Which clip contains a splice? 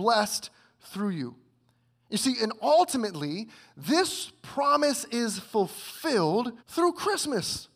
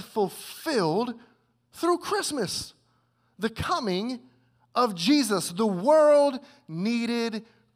first; 1 cut; at 6.6 s

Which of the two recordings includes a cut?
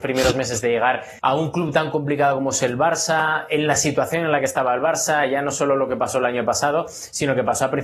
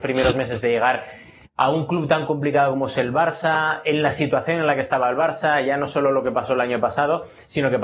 first; 1 cut; at 1.2 s

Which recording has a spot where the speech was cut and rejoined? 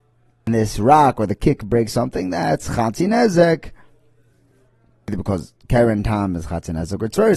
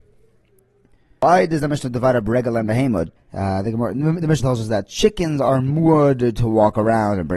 second; 2 cuts; at 3.2 s, 4.4 s

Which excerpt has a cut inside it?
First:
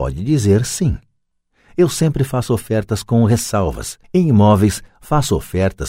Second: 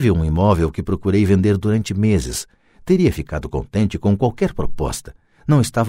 first; 1 cut; at 4.0 s

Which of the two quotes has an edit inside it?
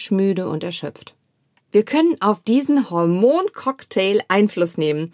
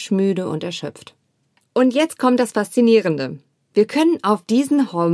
first; 1 cut; at 1.6 s

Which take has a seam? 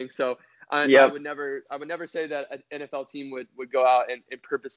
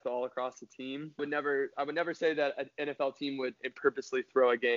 second; 2 cuts; at 1.2 s, 3.6 s

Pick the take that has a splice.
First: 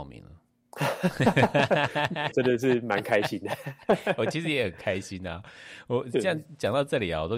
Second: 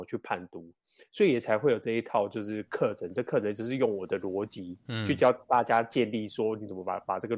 first; 1 cut; at 2.3 s

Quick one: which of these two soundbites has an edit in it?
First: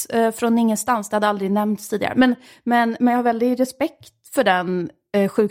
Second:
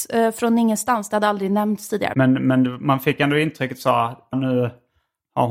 second; 2 cuts; at 2.1 s, 4.3 s

